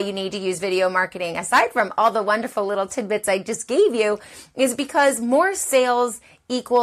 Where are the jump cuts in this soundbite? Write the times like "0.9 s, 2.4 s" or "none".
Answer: none